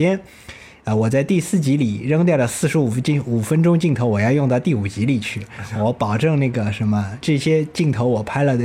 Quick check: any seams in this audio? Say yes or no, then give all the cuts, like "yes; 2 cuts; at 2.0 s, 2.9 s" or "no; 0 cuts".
yes; 1 cut; at 7.2 s